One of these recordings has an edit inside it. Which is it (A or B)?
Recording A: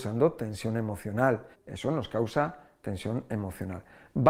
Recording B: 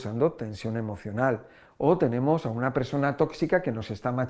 A